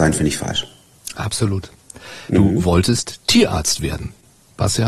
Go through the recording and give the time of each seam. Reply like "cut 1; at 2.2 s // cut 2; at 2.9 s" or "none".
cut 1; at 2.3 s